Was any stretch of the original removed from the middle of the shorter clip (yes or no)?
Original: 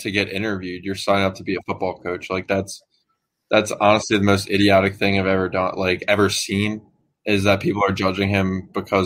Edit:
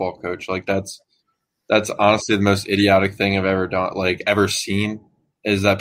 no